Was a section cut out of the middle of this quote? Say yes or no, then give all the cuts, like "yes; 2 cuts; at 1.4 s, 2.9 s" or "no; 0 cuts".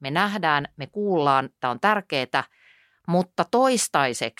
no; 0 cuts